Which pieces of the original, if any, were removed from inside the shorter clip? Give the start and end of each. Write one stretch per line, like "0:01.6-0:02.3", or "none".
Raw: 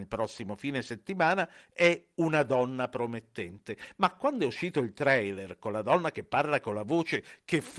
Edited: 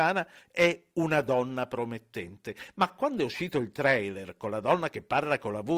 none